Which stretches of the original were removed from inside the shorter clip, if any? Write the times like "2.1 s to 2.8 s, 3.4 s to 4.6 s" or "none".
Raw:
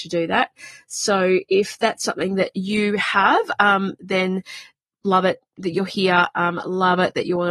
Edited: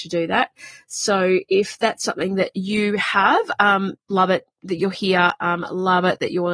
4.0 s to 4.9 s

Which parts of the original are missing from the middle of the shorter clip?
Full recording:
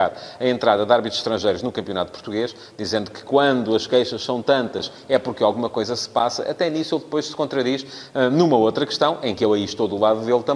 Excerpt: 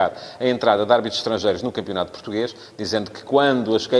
none

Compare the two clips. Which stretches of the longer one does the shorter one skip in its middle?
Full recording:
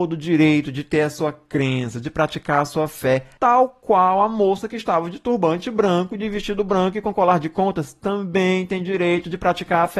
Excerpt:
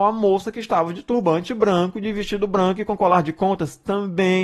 none

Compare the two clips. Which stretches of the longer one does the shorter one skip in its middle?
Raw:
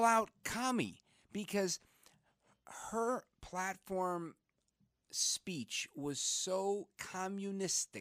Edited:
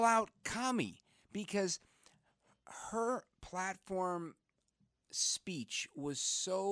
none

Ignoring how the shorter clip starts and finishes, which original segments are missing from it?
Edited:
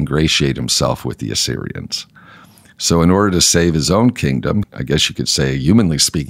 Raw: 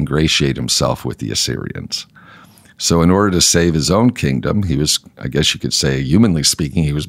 4.6 s to 5.1 s

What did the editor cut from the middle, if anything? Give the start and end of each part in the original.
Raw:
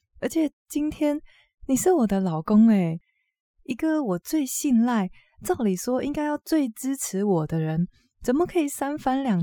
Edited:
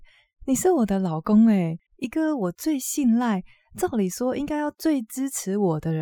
3.1 s to 3.5 s

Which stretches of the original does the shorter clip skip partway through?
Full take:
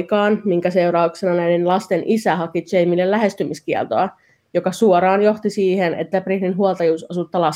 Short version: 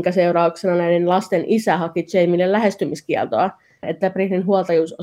4.4 s to 5.9 s

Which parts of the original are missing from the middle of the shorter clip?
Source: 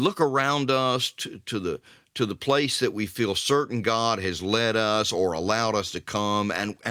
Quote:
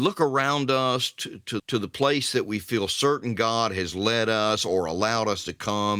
1.6 s to 2.1 s

